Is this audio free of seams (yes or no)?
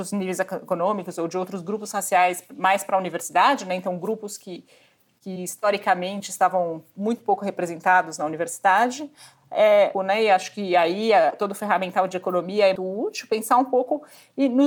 no